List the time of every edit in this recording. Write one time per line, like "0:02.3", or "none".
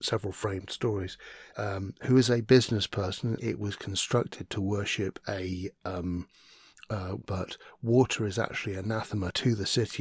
0:01.5
0:03.4
0:07.2